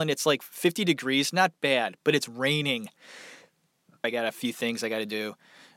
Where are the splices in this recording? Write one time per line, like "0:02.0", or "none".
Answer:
0:04.0